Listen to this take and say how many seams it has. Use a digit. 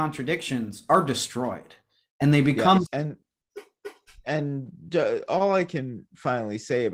1